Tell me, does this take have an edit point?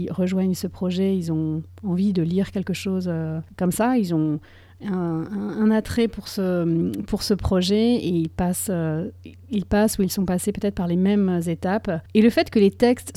yes; 1 cut; at 12.1 s

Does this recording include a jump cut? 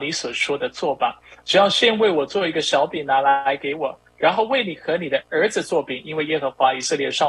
no; 0 cuts

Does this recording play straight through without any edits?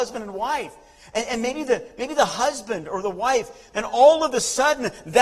no; 1 cut; at 3.7 s

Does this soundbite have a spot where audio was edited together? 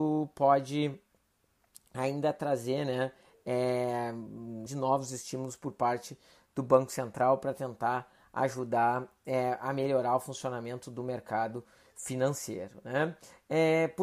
yes; 1 cut; at 4.7 s

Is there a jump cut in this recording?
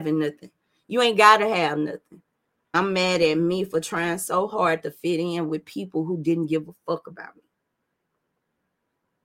yes; 1 cut; at 2.7 s

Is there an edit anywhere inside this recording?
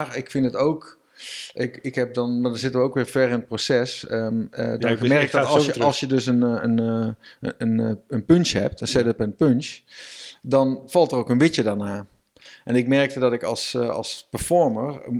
no; 0 cuts

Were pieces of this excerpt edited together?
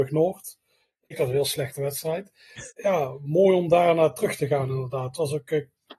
yes; 2 cuts; at 1.1 s, 2.7 s

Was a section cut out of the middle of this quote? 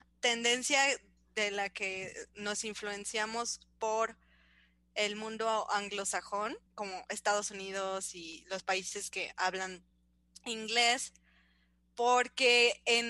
yes; 1 cut; at 6.7 s

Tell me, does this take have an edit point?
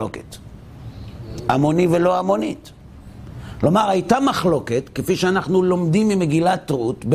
no; 0 cuts

